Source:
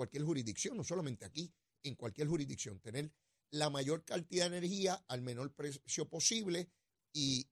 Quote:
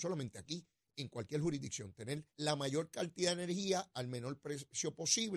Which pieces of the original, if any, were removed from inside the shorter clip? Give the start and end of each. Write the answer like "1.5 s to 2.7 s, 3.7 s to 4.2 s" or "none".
3.2 s to 3.4 s